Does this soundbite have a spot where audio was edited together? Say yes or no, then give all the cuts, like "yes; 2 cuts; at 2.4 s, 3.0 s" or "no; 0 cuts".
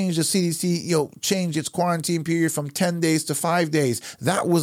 no; 0 cuts